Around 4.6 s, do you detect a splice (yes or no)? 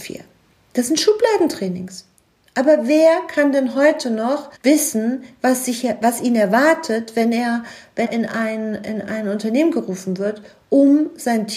yes